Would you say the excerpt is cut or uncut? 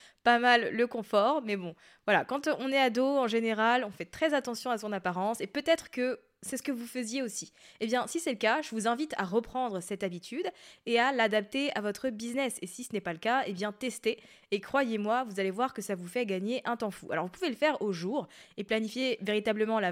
uncut